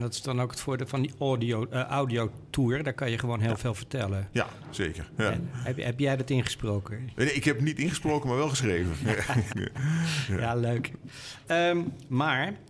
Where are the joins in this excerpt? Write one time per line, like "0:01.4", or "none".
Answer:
0:09.5